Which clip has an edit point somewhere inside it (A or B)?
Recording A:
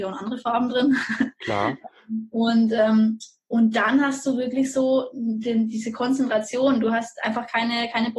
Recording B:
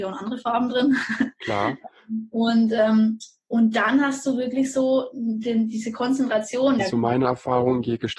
B